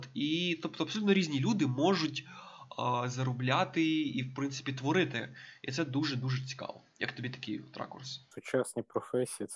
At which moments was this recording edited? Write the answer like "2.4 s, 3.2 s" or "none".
none